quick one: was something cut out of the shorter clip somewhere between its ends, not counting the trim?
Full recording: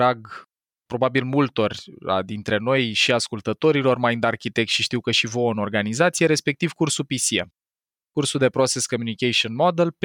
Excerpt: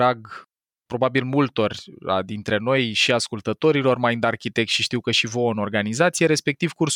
no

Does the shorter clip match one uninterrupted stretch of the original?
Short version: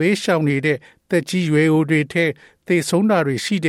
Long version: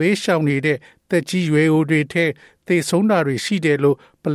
yes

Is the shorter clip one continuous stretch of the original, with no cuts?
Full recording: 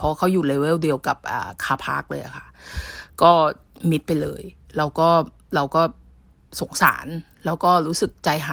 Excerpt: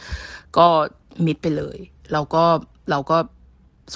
yes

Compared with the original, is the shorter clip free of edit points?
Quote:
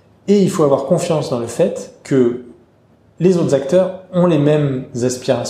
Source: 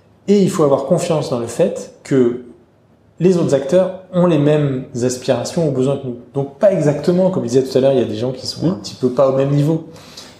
yes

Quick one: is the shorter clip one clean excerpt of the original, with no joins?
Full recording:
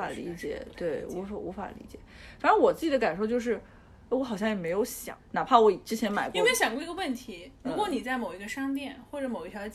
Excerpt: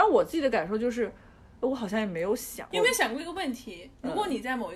no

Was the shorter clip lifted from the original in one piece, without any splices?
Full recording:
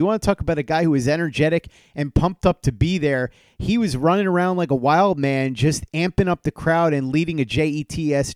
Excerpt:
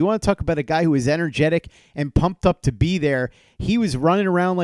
yes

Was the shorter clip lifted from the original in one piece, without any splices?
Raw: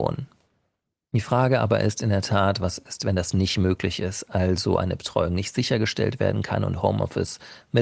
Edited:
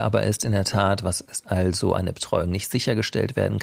no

